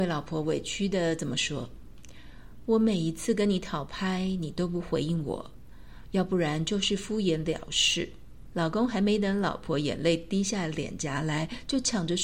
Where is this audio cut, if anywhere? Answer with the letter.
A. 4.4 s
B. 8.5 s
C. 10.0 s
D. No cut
B